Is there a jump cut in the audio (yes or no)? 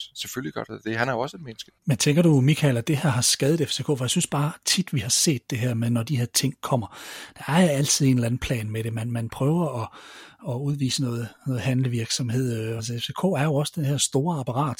yes